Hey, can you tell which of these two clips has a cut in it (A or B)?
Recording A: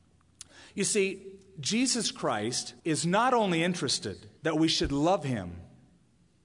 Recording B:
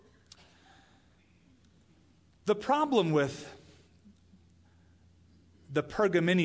A